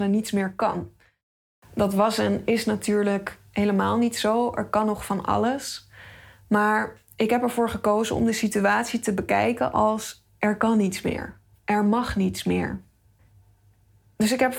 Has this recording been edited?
no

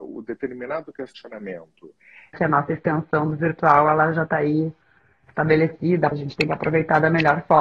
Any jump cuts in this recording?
yes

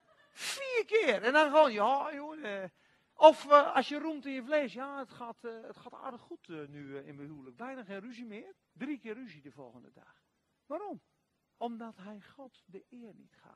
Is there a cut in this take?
yes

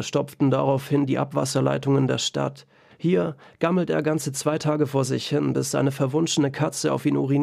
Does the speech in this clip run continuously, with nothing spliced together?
no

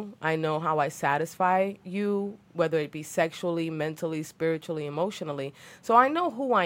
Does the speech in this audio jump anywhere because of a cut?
no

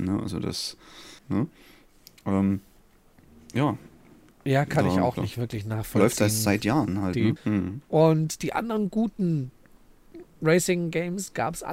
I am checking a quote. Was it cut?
yes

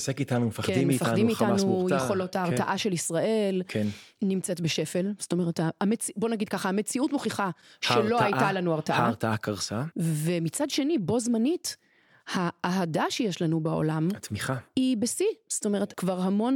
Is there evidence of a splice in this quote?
no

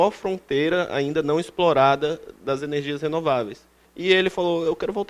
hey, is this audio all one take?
no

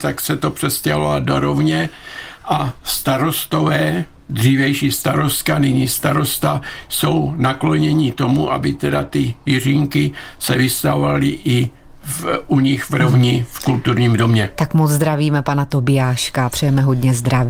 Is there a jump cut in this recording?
no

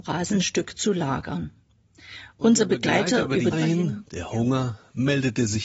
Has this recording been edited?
yes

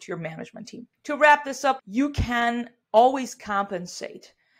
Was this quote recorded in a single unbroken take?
no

